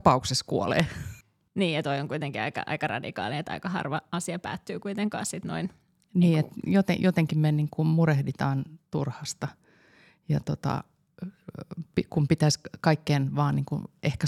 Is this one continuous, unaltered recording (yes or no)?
yes